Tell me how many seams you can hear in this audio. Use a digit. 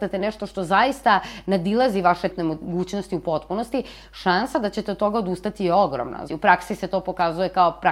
2